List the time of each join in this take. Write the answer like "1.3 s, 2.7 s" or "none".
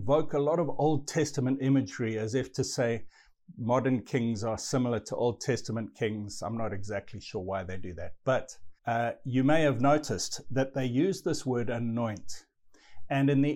8.8 s